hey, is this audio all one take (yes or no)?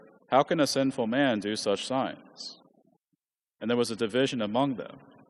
yes